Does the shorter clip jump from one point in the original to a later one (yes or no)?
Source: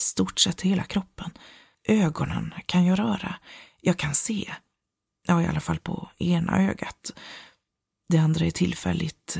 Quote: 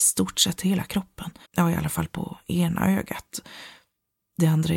yes